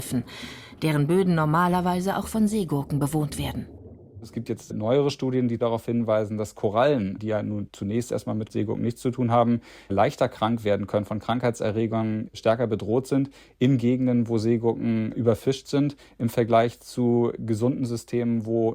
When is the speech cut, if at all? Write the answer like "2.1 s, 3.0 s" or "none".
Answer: none